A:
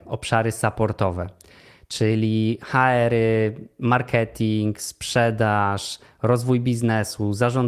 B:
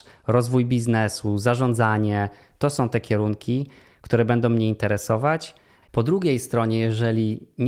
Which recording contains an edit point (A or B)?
B